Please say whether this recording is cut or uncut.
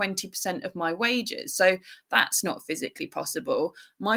uncut